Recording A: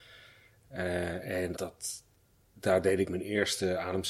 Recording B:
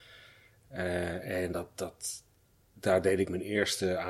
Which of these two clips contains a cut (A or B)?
A